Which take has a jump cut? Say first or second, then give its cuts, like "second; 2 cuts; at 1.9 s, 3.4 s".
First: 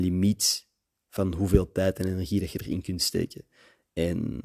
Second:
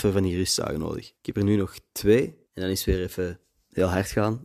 second; 2 cuts; at 1.2 s, 2.5 s